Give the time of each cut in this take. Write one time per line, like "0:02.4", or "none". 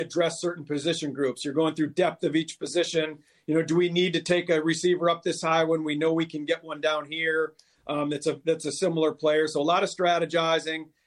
none